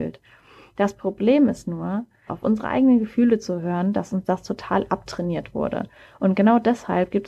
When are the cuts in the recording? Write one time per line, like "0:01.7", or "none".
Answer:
0:02.3